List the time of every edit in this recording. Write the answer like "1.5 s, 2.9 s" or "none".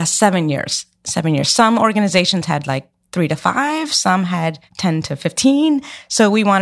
4.7 s